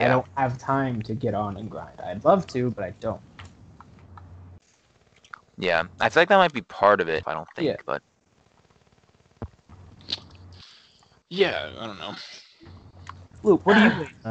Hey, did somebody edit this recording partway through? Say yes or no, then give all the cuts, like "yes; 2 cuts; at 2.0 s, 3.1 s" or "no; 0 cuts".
yes; 1 cut; at 7.2 s